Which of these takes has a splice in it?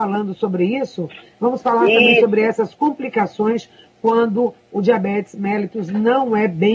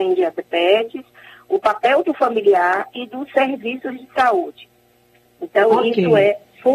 first; 1 cut; at 1.3 s

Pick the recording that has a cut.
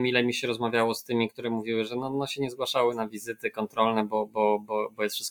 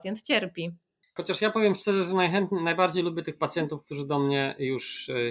second; 1 cut; at 1.2 s

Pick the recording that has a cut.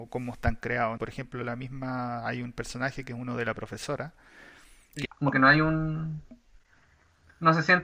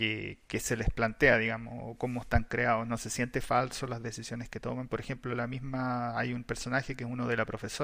first; 2 cuts; at 1.0 s, 5.1 s

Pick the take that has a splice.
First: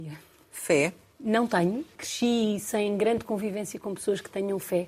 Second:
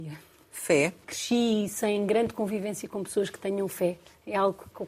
second; 1 cut; at 1.0 s

